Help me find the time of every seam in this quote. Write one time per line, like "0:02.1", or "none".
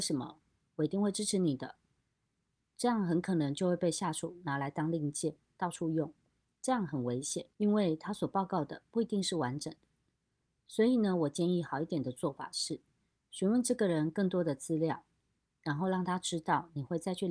0:07.5